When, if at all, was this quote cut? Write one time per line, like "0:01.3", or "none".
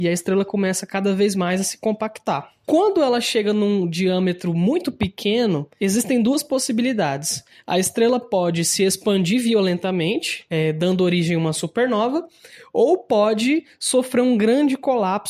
none